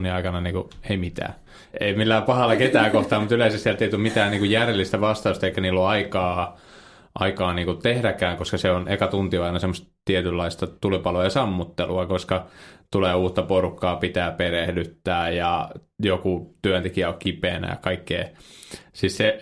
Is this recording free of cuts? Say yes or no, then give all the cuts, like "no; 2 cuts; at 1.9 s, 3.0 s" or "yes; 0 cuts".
no; 1 cut; at 1.7 s